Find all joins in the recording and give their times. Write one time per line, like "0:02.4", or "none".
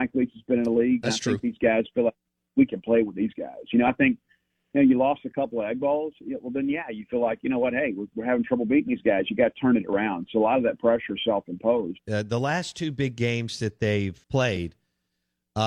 0:12.0
0:14.2